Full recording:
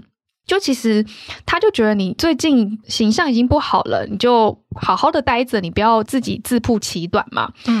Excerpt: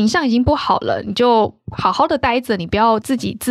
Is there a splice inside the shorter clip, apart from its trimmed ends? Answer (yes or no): no